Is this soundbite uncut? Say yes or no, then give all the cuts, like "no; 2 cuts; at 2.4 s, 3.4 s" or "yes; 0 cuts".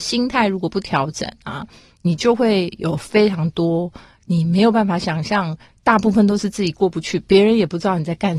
yes; 0 cuts